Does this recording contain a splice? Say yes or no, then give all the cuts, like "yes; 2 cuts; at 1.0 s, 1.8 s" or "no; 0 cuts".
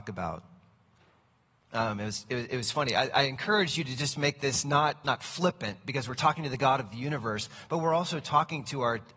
no; 0 cuts